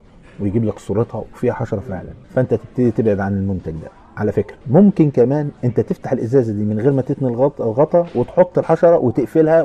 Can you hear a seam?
yes; 2 cuts; at 2.2 s, 4.6 s

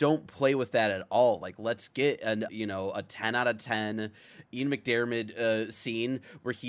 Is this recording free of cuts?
no; 1 cut; at 2.5 s

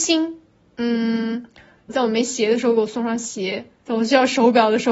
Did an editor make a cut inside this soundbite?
yes; 2 cuts; at 1.9 s, 3.8 s

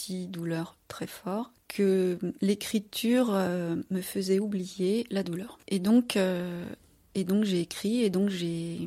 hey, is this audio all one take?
yes; 0 cuts

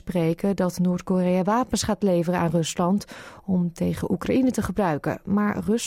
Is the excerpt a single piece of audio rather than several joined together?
yes; 0 cuts

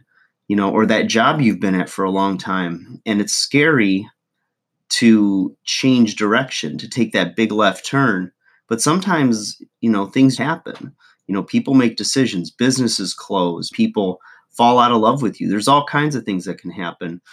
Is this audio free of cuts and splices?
no; 2 cuts; at 10.4 s, 13.7 s

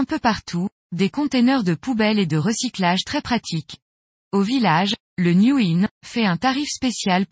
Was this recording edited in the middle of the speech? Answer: yes; 2 cuts; at 4.2 s, 5.9 s

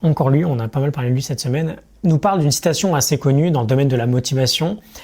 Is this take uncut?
yes; 0 cuts

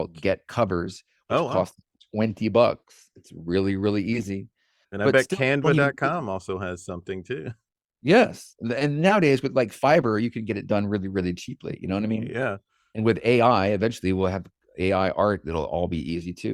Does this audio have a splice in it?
no; 0 cuts

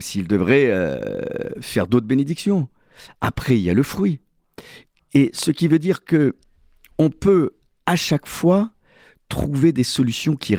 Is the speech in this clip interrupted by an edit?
no; 0 cuts

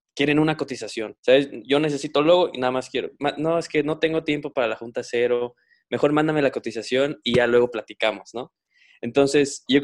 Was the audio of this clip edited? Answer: yes; 1 cut; at 1.2 s

